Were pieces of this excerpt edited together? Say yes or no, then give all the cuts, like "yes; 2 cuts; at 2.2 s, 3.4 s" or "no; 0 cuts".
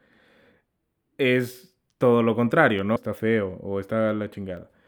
yes; 1 cut; at 3.0 s